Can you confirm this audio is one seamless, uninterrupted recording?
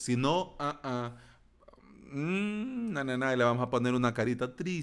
yes; 0 cuts

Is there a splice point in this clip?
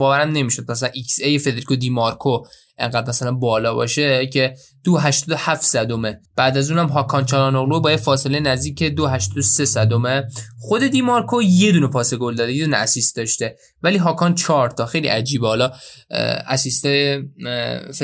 yes; 1 cut; at 6.3 s

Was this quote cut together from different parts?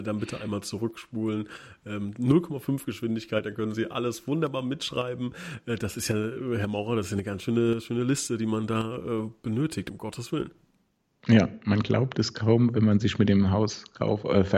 no; 0 cuts

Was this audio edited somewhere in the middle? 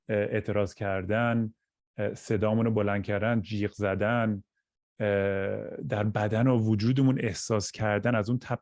no; 0 cuts

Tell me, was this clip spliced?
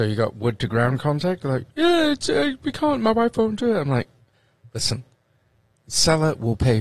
yes; 1 cut; at 1.7 s

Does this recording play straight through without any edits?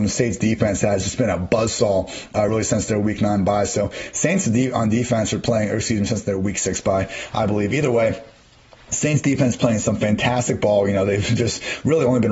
yes; 0 cuts

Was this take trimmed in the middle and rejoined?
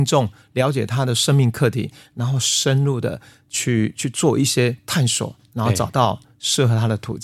no; 0 cuts

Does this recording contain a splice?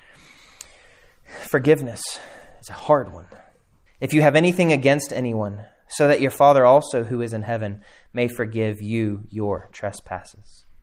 yes; 1 cut; at 3.9 s

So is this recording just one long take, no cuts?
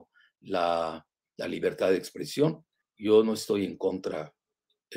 yes; 0 cuts

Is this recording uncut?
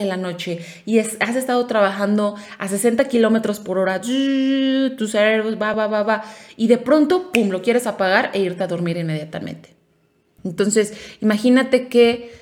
no; 2 cuts; at 5.7 s, 10.4 s

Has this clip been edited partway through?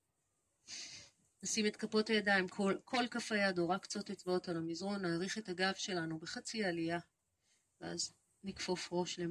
no; 0 cuts

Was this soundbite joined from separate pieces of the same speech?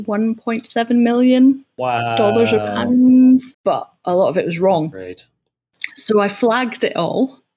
yes; 1 cut; at 3.5 s

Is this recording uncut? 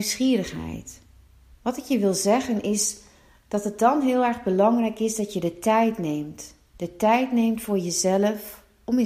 no; 1 cut; at 1.6 s

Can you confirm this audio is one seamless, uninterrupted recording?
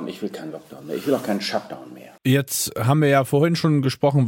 no; 1 cut; at 2.2 s

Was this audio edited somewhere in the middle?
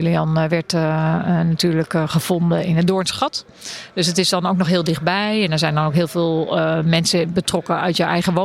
no; 0 cuts

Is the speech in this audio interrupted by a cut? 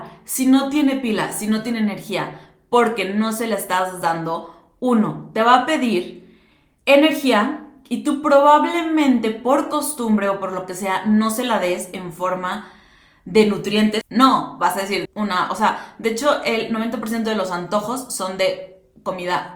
yes; 2 cuts; at 14.0 s, 15.1 s

